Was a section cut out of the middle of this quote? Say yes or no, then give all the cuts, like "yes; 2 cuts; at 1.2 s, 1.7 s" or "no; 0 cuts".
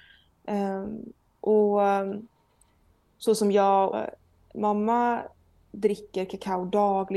yes; 1 cut; at 3.9 s